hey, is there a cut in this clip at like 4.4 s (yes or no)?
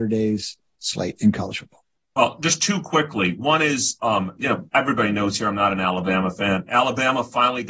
yes